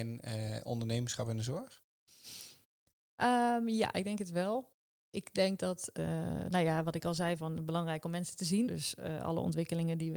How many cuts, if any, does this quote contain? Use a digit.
2